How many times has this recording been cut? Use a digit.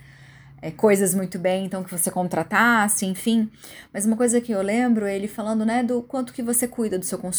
0